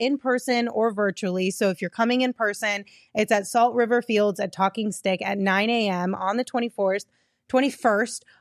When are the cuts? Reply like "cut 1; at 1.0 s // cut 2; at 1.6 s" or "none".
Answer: none

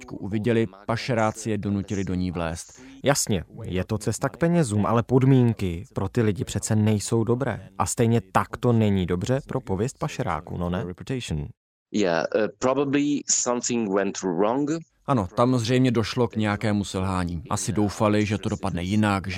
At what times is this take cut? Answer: cut 1; at 3.0 s

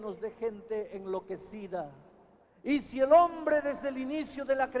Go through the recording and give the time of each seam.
cut 1; at 2.4 s

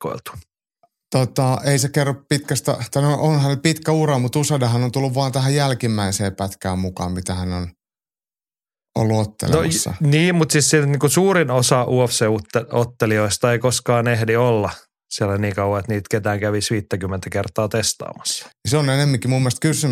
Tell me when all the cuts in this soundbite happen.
cut 1; at 18.5 s

